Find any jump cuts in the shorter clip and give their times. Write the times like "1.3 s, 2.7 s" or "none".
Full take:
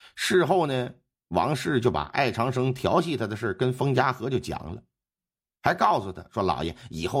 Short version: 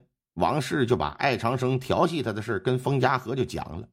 none